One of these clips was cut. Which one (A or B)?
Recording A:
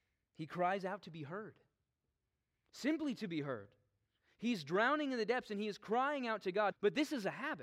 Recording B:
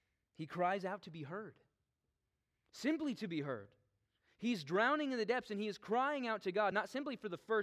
A